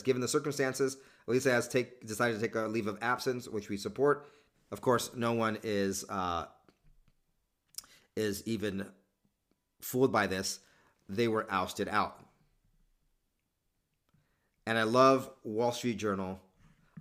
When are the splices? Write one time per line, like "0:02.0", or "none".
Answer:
0:04.5

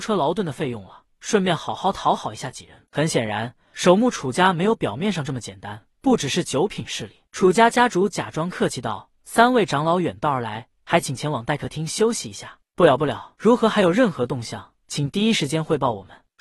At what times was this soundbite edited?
0:02.8
0:13.3

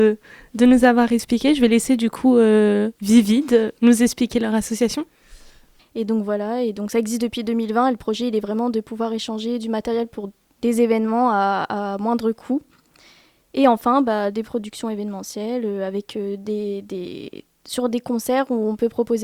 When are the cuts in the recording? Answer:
0:05.8

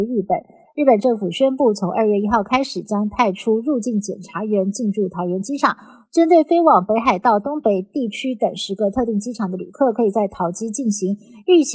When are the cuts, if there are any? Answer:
none

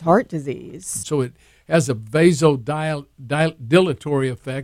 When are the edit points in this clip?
0:01.0

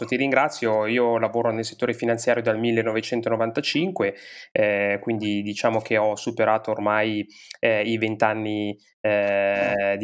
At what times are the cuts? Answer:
none

